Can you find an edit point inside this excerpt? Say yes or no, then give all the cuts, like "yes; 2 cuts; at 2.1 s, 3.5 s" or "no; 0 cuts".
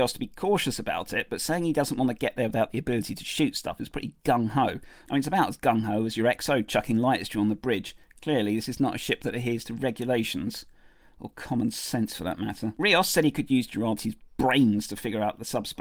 no; 0 cuts